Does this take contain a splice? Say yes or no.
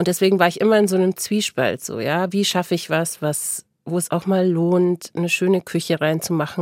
no